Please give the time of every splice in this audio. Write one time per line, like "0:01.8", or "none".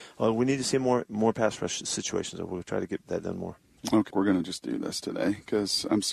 0:04.1